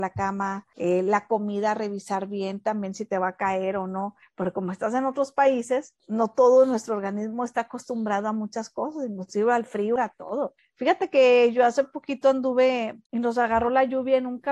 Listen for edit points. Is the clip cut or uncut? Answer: cut